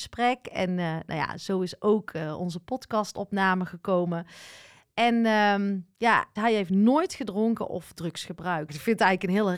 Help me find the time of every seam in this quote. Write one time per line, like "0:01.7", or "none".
0:06.4
0:08.7